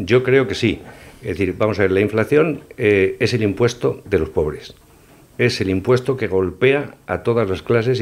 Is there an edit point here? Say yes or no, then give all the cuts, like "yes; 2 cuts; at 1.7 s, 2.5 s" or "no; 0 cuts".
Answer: no; 0 cuts